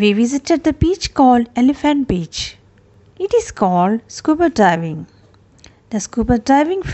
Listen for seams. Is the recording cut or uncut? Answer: cut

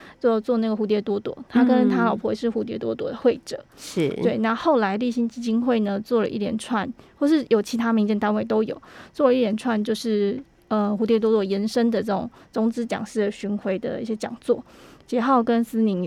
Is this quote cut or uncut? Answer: uncut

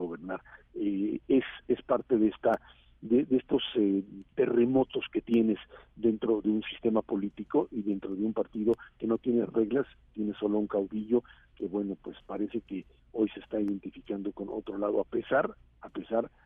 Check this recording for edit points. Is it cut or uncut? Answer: uncut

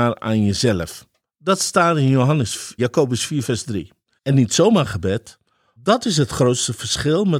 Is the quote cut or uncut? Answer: cut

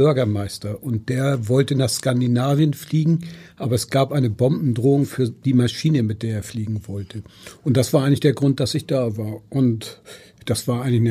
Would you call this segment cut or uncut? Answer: uncut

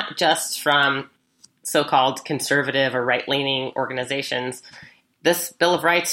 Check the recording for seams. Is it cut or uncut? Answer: uncut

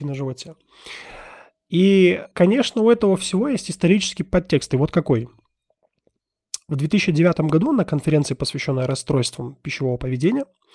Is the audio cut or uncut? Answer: cut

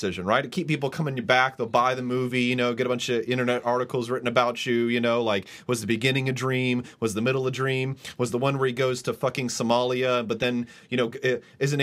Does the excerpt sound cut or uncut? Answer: uncut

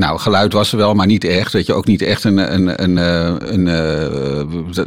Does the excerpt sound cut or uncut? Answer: uncut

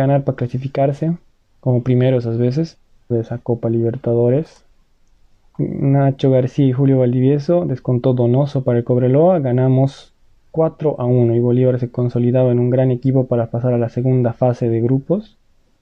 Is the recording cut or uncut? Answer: cut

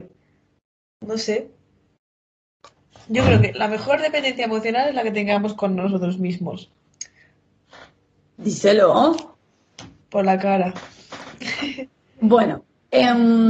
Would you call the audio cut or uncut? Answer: uncut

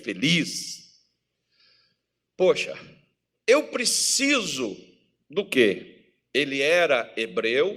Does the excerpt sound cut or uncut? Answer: cut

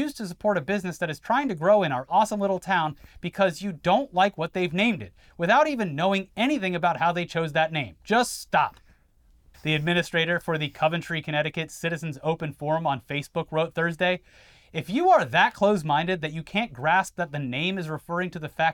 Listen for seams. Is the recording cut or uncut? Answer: cut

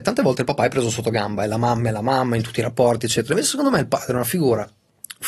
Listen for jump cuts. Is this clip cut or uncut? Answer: uncut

